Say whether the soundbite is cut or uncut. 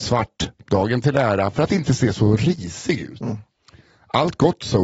uncut